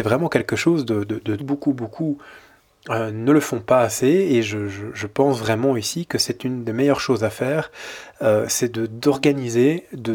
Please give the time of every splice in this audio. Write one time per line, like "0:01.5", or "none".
0:01.4

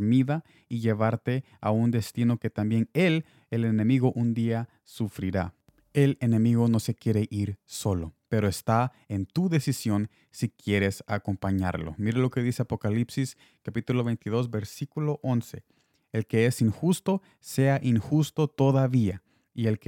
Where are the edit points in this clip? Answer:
none

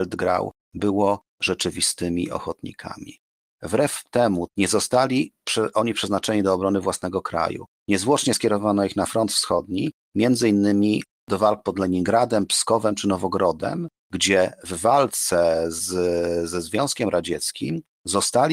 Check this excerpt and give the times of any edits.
0:04.5

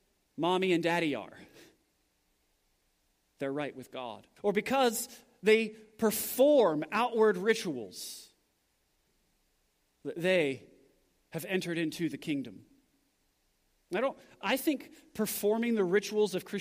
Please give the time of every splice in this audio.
0:04.4

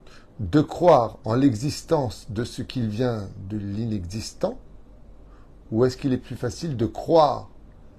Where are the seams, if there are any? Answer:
none

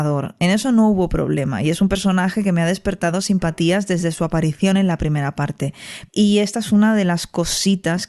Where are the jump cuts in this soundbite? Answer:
0:06.1

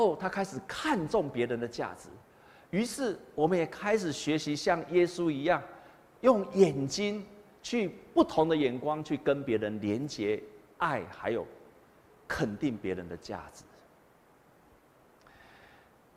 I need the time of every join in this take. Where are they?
none

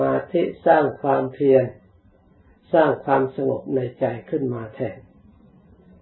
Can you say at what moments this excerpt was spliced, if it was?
none

